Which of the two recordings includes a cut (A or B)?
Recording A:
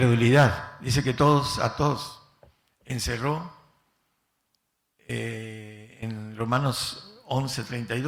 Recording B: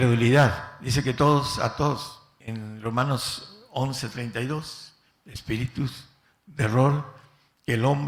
B